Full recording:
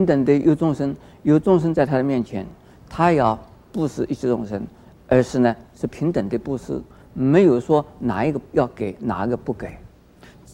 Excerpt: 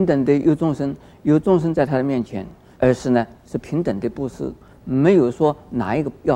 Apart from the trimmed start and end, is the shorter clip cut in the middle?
yes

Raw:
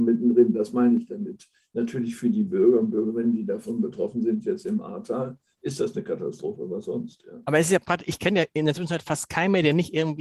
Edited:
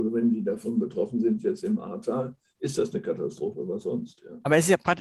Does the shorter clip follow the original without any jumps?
yes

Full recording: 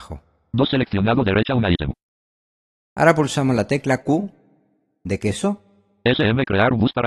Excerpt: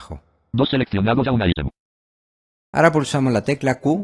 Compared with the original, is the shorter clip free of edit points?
no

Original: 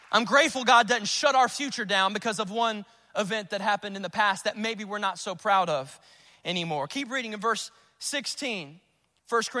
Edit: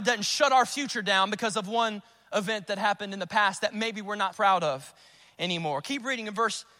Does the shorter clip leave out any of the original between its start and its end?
yes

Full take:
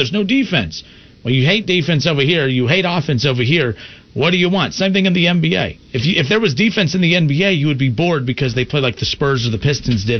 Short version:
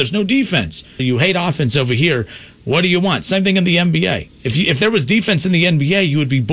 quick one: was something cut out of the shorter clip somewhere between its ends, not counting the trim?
yes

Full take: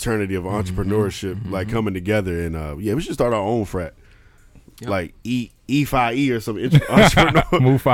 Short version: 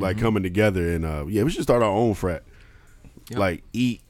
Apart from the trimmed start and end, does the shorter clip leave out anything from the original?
no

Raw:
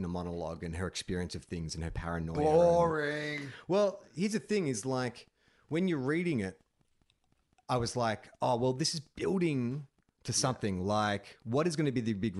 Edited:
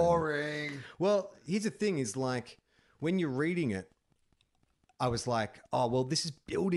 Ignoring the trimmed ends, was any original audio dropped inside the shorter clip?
no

